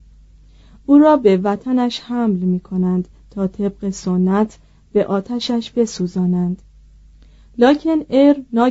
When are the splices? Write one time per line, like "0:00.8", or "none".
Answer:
none